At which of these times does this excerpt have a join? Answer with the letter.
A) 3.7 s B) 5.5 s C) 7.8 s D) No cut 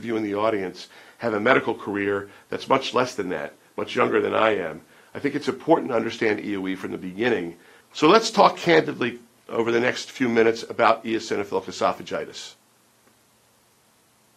C